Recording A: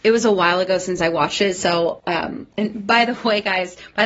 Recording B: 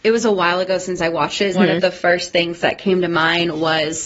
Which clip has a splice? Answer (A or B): B